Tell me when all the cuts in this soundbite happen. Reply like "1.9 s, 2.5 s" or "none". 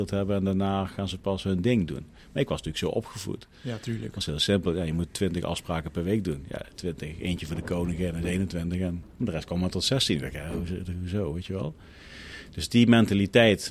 none